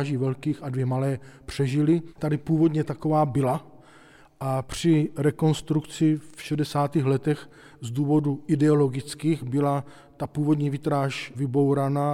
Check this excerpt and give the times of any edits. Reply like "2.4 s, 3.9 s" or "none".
2.2 s

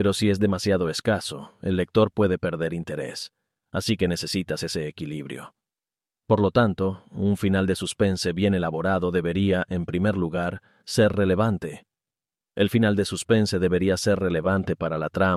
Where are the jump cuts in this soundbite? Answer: none

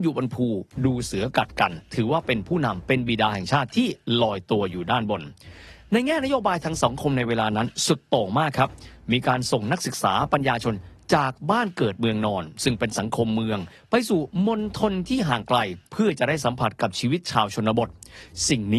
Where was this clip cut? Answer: 15.9 s

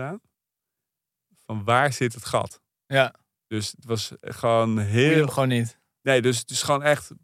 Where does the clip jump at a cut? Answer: 2.8 s

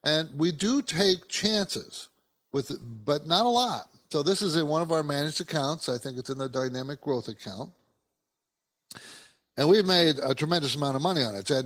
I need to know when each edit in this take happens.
none

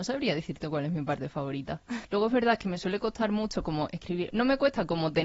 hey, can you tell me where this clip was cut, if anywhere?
2.0 s, 4.3 s

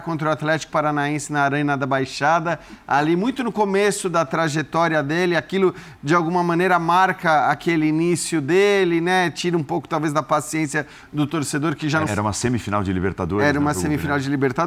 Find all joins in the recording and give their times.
12.1 s

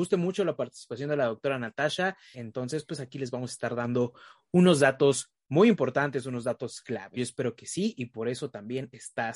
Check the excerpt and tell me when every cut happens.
2.3 s, 7.2 s

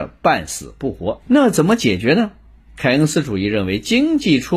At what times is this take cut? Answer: 1.2 s

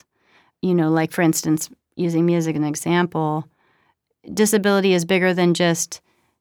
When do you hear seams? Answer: none

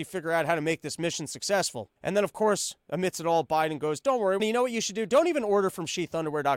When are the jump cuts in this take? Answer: 2.0 s, 4.4 s

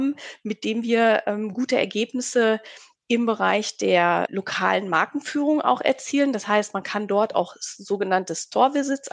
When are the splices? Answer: none

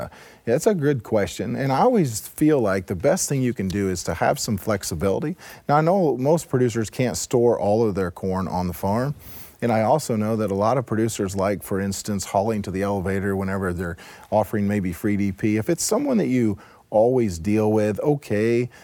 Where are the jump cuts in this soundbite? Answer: none

